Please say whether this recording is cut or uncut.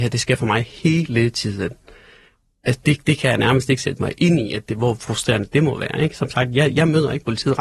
uncut